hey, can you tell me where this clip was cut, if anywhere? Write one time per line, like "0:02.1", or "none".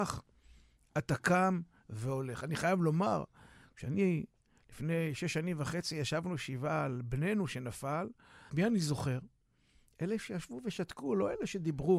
0:08.5